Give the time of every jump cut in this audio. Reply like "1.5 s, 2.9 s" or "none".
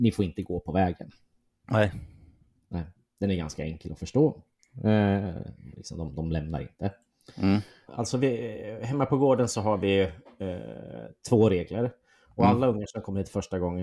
5.7 s, 7.9 s